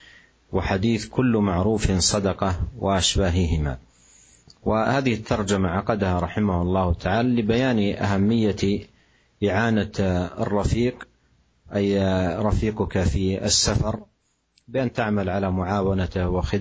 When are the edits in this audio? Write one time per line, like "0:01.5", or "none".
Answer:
none